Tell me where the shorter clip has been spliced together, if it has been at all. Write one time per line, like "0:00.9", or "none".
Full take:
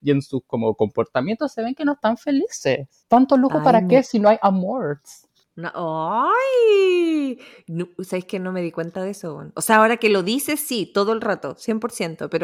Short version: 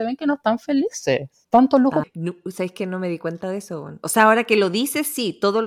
0:02.0